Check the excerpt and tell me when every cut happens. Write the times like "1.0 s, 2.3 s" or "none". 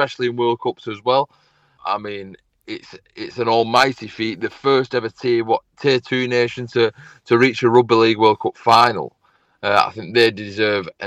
1.8 s